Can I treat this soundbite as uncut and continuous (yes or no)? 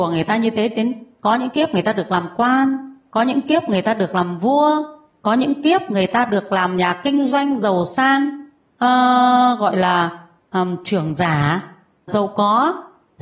no